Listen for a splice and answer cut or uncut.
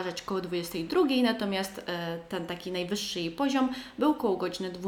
uncut